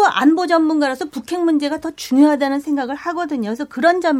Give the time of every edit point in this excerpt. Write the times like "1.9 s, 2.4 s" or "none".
none